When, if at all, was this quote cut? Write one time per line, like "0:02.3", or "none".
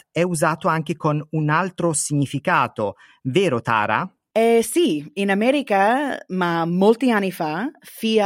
none